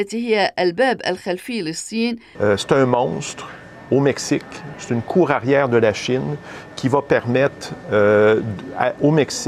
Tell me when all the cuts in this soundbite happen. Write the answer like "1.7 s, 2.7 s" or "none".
2.4 s